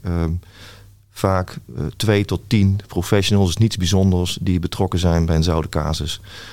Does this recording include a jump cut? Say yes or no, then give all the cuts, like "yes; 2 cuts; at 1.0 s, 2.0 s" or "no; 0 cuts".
no; 0 cuts